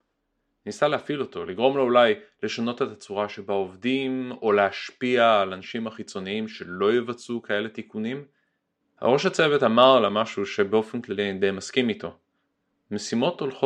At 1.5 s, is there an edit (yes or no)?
no